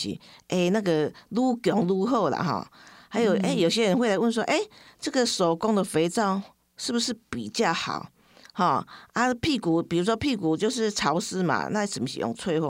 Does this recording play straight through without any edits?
yes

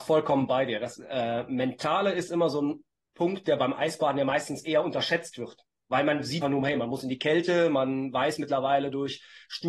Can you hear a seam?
yes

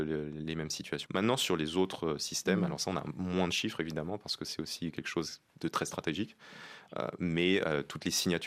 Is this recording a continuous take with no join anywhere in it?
no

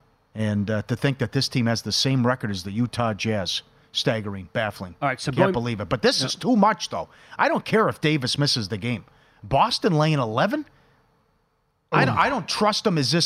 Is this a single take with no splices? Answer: yes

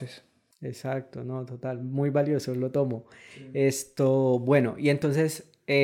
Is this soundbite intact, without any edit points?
yes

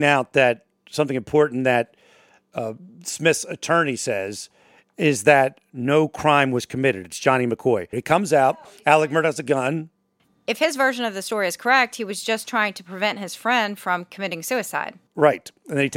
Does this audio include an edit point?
yes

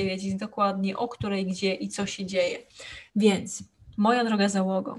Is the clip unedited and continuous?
no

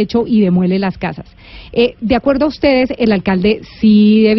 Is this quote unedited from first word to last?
yes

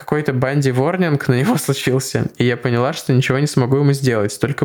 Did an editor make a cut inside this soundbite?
no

